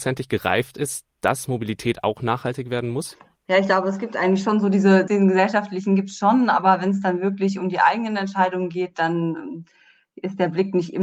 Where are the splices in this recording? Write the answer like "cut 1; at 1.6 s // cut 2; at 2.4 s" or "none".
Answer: cut 1; at 5.1 s